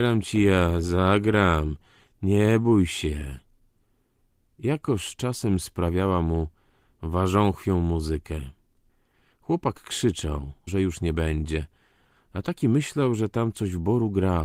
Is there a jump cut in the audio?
yes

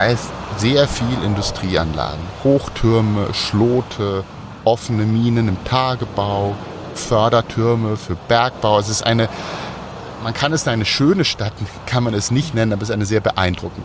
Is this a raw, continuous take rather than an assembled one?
yes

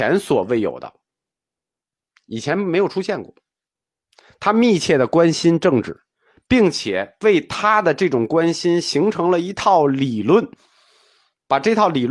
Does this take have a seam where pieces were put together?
no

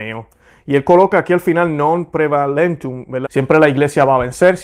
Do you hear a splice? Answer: yes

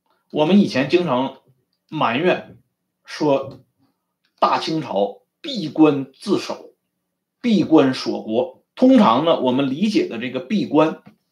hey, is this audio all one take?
no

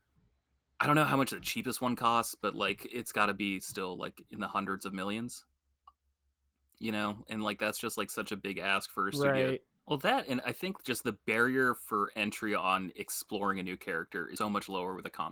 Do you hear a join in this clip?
yes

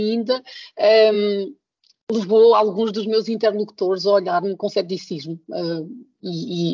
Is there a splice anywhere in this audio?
no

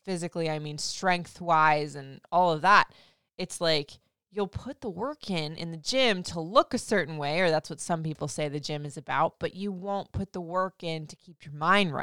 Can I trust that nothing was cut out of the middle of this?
yes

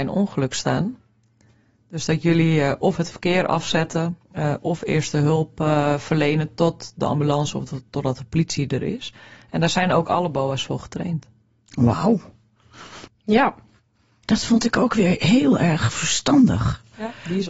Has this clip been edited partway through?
yes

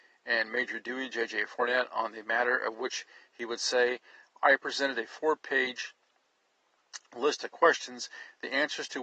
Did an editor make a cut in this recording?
no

